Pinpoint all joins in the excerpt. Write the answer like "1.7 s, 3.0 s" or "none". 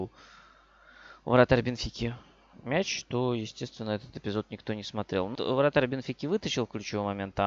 5.3 s